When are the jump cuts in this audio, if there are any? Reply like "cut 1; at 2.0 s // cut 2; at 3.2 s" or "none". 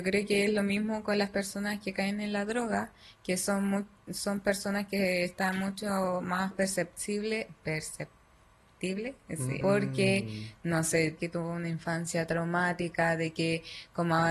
cut 1; at 9.6 s // cut 2; at 11.2 s

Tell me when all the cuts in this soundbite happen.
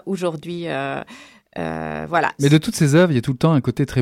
cut 1; at 2.4 s

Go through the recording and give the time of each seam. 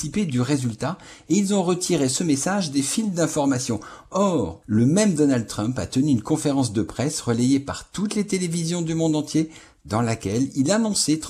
cut 1; at 4.6 s

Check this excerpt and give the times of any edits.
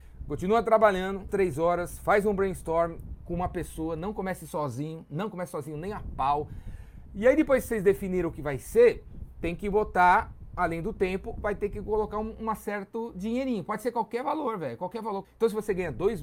cut 1; at 1.3 s // cut 2; at 15.2 s

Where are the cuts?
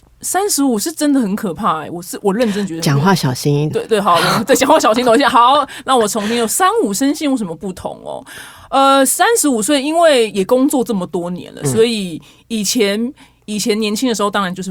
cut 1; at 3.7 s

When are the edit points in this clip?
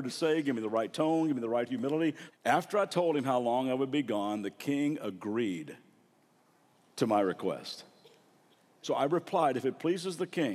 cut 1; at 2.3 s // cut 2; at 8.8 s

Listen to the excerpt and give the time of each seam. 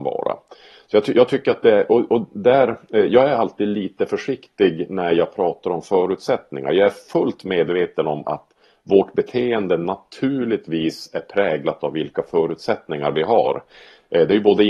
none

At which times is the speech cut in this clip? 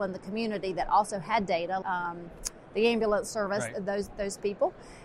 cut 1; at 1.8 s

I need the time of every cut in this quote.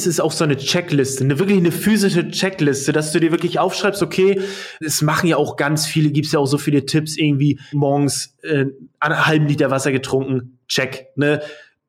cut 1; at 4.8 s // cut 2; at 7.7 s

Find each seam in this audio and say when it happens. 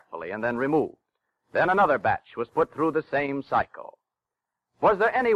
none

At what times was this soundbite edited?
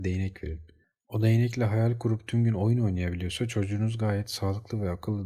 none

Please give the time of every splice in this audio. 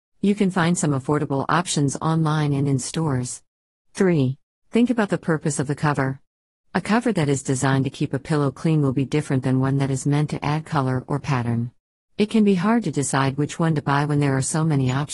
cut 1; at 4.6 s // cut 2; at 12.0 s

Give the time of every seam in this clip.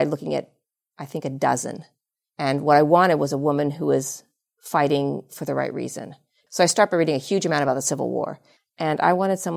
cut 1; at 6.5 s // cut 2; at 8.6 s

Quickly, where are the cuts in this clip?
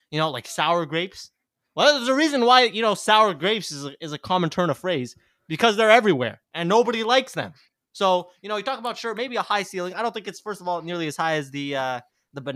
cut 1; at 6.4 s

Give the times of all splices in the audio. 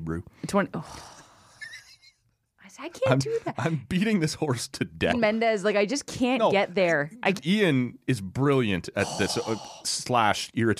cut 1; at 5.1 s // cut 2; at 7.4 s

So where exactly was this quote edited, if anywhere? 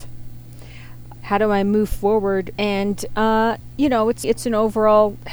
cut 1; at 1.2 s // cut 2; at 2.6 s // cut 3; at 4.2 s

